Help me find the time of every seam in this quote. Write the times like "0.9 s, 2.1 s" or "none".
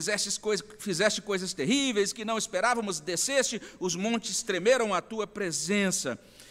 none